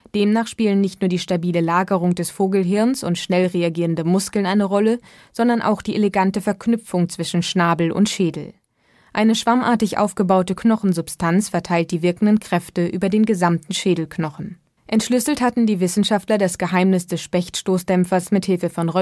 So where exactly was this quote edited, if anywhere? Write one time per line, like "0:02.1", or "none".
0:14.8